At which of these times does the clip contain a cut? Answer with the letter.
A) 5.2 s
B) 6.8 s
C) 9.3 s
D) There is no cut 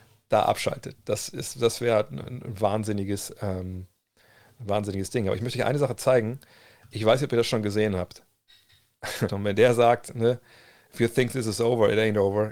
C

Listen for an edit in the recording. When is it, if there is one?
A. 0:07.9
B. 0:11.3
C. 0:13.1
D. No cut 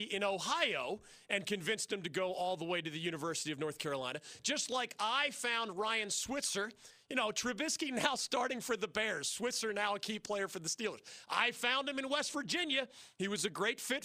D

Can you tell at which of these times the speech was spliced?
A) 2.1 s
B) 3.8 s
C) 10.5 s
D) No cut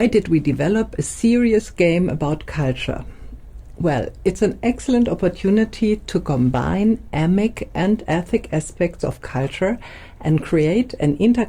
D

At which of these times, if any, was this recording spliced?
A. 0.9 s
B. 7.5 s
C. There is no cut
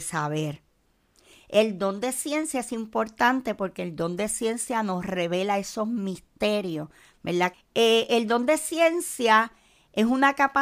B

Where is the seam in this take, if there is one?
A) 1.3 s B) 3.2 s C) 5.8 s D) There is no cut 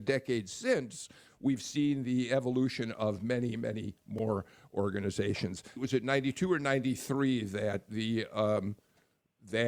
C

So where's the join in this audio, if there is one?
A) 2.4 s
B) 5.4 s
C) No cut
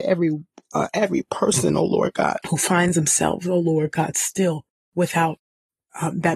A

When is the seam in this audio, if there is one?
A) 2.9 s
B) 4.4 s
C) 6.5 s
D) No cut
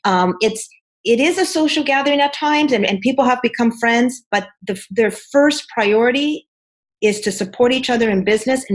D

